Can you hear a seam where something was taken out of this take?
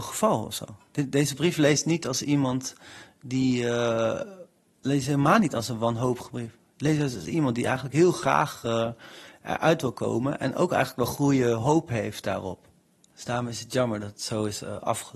no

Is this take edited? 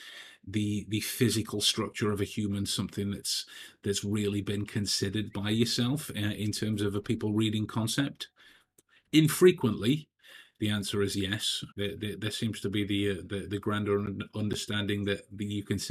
yes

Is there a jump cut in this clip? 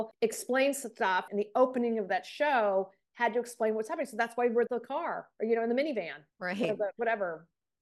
yes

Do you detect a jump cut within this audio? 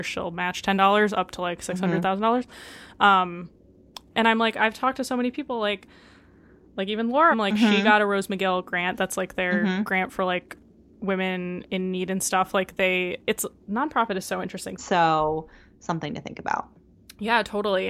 yes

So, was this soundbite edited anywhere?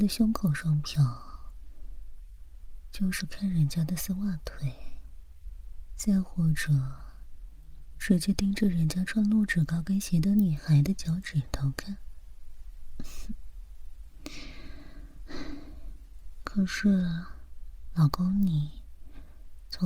no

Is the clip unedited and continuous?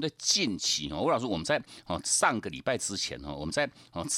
yes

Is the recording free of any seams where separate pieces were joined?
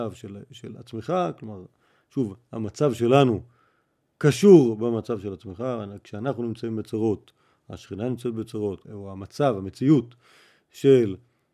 no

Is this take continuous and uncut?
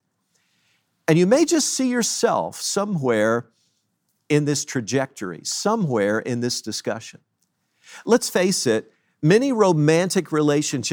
yes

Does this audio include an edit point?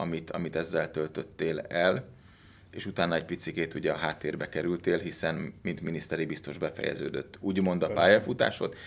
no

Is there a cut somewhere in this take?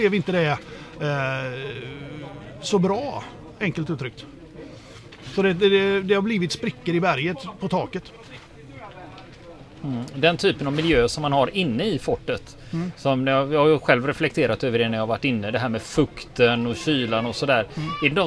no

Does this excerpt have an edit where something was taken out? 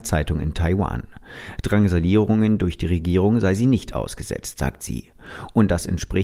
no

